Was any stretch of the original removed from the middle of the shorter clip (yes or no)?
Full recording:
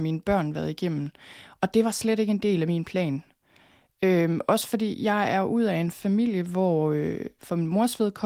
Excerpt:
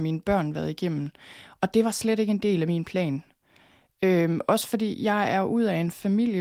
no